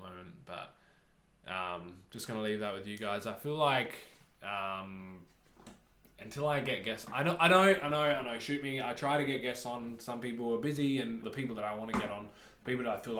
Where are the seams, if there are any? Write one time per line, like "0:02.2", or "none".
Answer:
0:11.2